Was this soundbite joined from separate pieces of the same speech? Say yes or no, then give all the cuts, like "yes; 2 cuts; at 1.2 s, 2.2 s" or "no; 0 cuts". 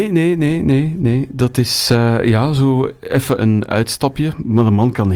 yes; 1 cut; at 3.4 s